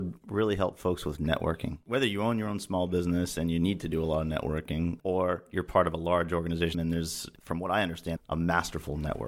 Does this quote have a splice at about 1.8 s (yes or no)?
no